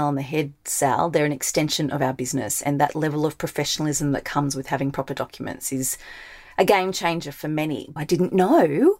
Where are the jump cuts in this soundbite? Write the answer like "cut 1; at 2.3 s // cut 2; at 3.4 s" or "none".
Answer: cut 1; at 8.0 s